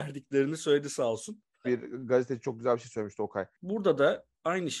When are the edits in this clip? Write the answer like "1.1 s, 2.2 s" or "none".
1.6 s, 3.5 s